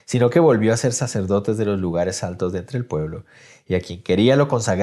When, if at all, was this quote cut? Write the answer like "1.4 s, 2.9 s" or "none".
none

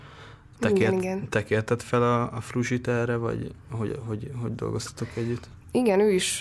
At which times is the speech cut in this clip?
none

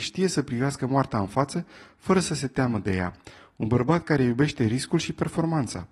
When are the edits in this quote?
none

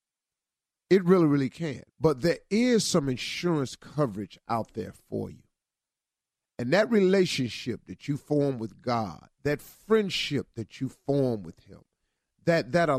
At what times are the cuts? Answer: 1.9 s

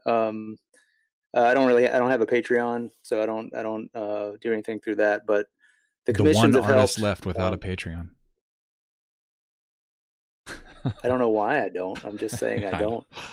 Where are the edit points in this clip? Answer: none

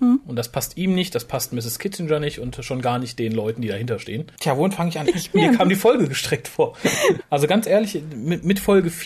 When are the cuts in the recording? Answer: 5.0 s, 7.2 s

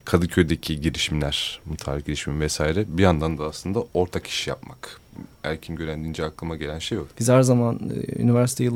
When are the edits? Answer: 7.1 s

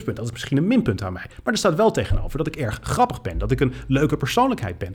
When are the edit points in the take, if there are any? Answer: none

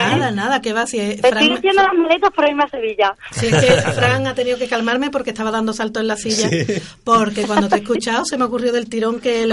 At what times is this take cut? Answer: none

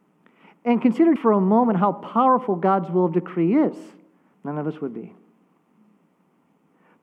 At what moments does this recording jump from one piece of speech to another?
1.2 s, 4.3 s

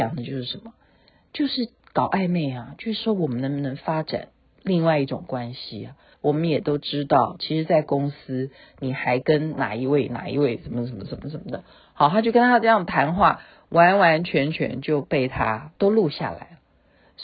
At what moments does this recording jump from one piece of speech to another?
6.1 s, 15.8 s

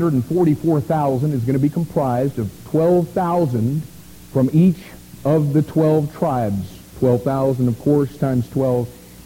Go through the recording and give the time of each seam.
none

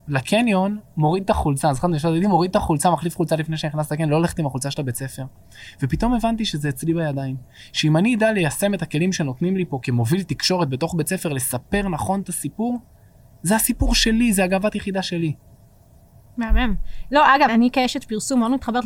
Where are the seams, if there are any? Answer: 17.5 s

